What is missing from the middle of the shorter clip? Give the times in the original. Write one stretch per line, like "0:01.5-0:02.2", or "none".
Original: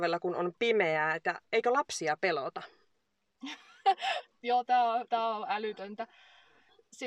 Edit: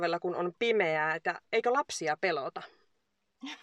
none